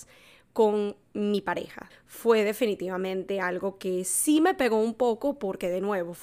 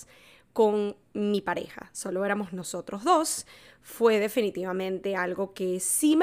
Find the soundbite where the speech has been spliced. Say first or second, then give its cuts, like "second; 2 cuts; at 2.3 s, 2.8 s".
first; 1 cut; at 1.9 s